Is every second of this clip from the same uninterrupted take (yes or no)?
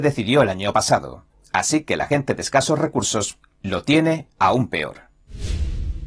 no